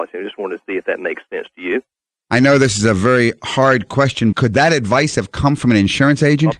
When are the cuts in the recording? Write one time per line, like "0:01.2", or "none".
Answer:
0:04.3